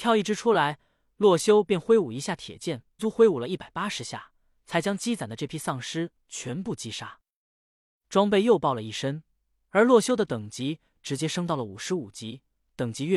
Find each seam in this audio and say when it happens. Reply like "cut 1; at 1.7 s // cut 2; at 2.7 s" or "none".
cut 1; at 3.0 s